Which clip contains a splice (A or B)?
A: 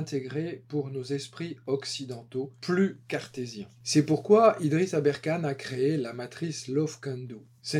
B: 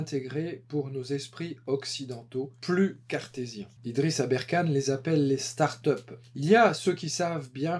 B